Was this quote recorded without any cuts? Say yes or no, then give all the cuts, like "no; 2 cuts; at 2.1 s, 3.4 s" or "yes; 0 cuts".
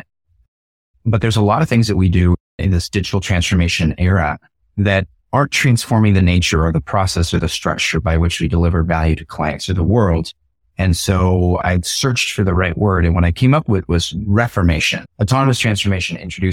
no; 1 cut; at 15.0 s